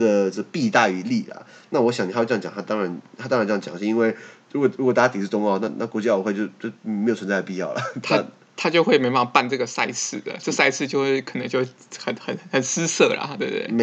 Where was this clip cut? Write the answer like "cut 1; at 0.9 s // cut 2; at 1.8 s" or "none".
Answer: none

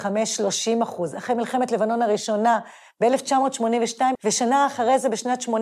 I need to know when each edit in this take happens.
cut 1; at 4.2 s

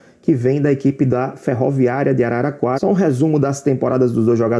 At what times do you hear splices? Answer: cut 1; at 2.8 s

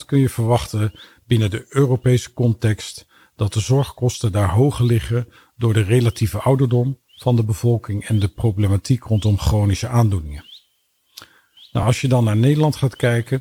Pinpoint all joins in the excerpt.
none

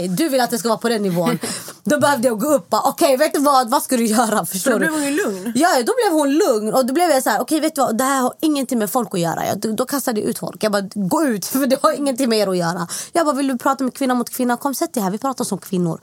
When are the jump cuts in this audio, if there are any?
none

